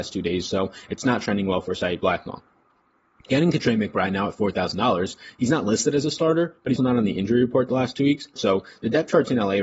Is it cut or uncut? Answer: cut